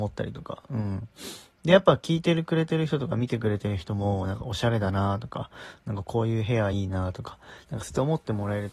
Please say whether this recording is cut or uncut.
uncut